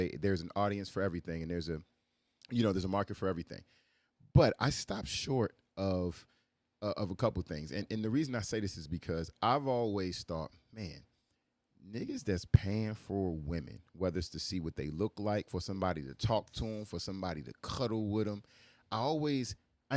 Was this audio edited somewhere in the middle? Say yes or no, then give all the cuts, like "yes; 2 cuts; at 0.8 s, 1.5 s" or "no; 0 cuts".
no; 0 cuts